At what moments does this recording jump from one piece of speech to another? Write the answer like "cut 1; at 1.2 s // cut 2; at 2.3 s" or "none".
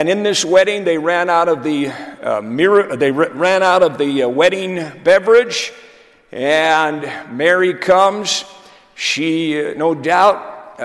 none